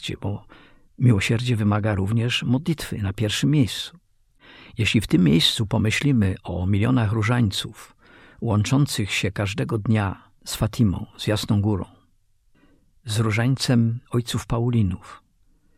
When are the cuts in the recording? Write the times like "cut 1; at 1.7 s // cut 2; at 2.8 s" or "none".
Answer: none

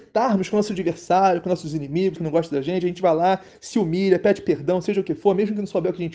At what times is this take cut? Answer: cut 1; at 2.2 s

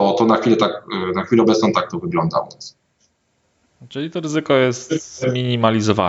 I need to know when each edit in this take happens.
none

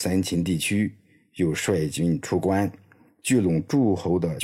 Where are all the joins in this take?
none

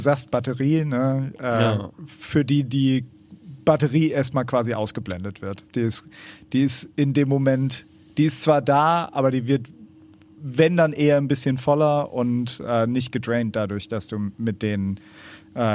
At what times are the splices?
none

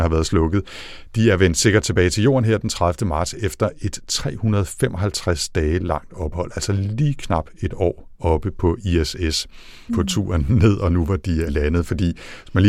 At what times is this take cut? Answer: cut 1; at 9.9 s // cut 2; at 11.5 s

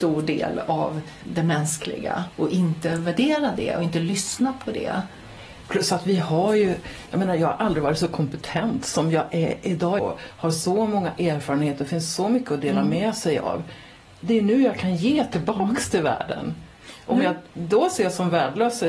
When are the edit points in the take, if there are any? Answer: cut 1; at 10.0 s

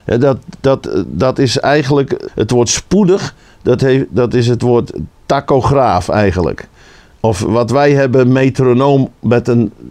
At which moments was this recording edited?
cut 1; at 2.3 s

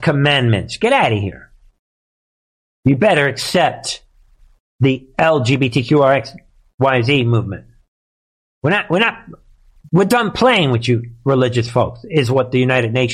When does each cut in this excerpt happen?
none

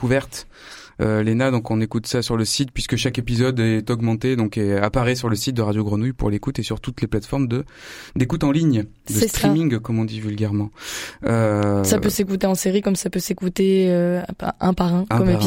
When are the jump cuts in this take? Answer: none

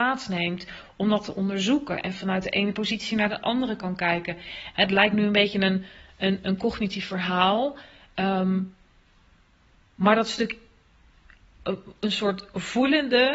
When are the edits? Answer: cut 1; at 4.7 s

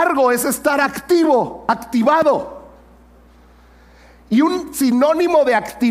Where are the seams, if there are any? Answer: none

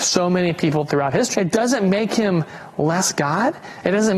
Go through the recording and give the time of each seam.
cut 1; at 1.3 s

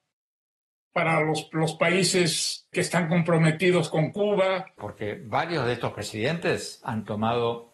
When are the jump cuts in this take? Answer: cut 1; at 2.7 s // cut 2; at 4.8 s

